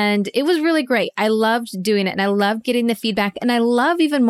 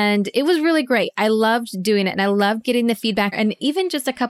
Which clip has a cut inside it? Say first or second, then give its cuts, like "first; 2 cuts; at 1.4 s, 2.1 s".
second; 1 cut; at 3.3 s